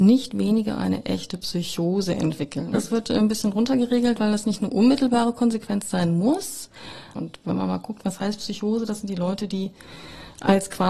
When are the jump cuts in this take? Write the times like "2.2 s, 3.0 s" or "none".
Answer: 2.7 s, 7.1 s